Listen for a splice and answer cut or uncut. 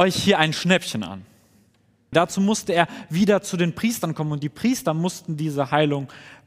cut